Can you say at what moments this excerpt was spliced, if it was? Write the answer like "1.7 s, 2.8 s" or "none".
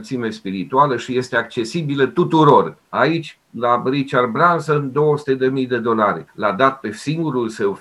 2.9 s, 6.3 s